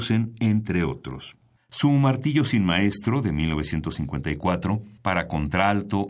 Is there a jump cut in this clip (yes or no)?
yes